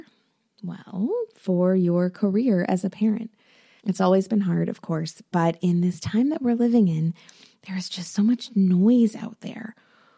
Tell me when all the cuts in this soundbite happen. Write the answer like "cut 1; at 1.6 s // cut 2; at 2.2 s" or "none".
cut 1; at 3.8 s